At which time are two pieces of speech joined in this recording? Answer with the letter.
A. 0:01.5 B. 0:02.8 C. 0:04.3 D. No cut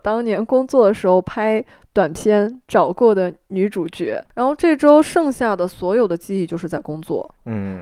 C